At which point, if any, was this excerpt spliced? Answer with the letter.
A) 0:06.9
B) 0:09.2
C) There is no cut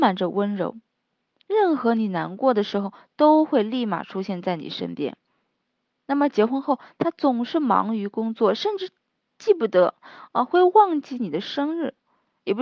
C